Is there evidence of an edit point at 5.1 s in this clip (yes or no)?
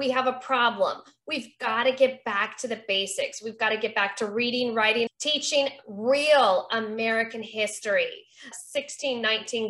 yes